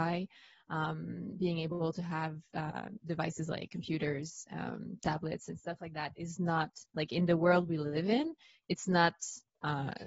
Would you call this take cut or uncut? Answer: uncut